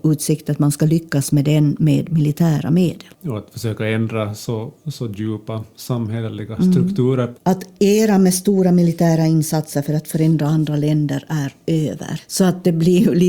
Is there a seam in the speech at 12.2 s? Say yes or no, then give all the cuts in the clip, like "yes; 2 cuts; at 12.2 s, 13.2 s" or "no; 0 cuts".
yes; 2 cuts; at 7.4 s, 12.2 s